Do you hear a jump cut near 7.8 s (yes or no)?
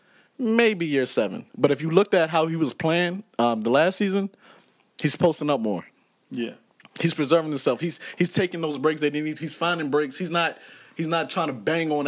no